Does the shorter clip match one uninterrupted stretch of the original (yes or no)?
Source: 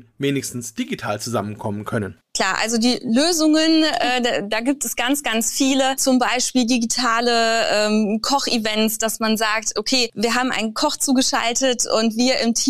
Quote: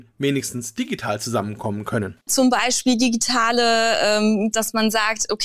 no